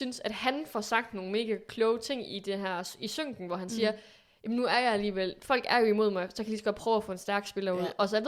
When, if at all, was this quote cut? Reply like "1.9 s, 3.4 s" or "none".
none

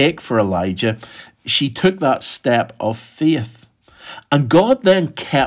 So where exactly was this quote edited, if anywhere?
none

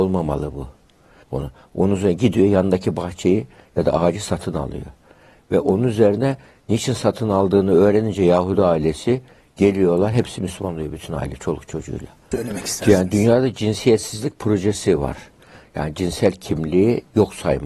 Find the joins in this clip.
1.2 s, 12.3 s

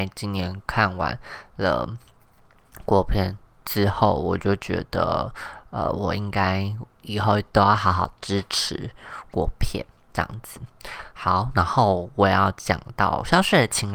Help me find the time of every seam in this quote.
none

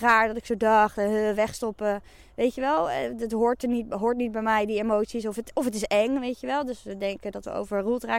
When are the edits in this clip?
none

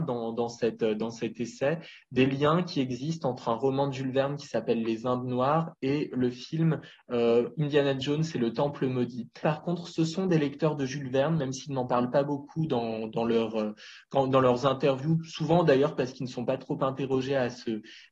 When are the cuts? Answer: 9.4 s

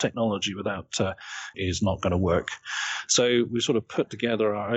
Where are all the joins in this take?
1.5 s

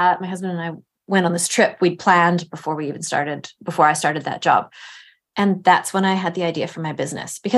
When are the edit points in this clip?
none

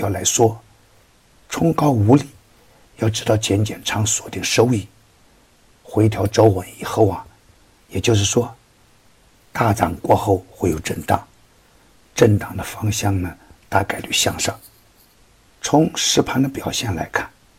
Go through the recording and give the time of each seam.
7.8 s

